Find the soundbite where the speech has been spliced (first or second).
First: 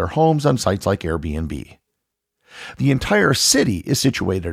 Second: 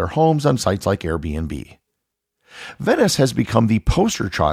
first